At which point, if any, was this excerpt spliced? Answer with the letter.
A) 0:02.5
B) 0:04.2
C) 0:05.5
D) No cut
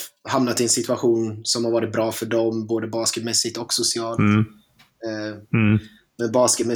C